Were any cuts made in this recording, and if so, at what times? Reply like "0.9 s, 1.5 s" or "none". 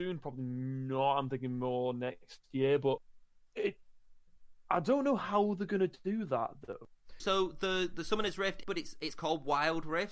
7.2 s, 8.6 s